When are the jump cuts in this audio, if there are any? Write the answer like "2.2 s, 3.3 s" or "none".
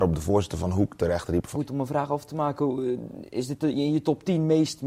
1.5 s